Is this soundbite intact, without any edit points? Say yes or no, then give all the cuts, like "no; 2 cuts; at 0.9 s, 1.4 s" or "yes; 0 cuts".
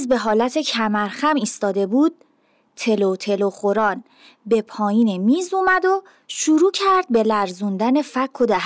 yes; 0 cuts